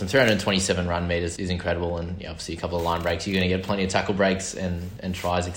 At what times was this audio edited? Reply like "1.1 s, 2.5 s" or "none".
1.4 s